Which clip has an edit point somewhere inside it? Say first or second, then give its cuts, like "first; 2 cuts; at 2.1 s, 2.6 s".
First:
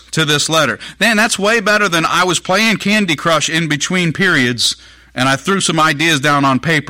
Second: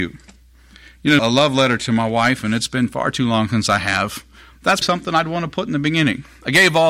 second; 2 cuts; at 1.2 s, 4.8 s